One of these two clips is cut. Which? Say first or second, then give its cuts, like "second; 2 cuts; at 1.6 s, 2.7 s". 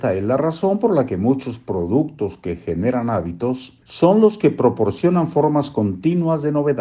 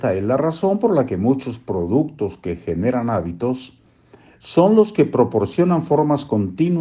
first; 1 cut; at 3.8 s